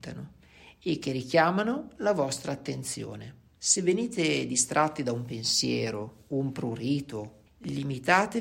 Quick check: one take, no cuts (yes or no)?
no